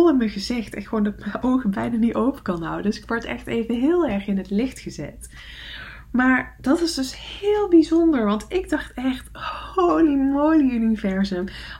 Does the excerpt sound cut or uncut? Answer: uncut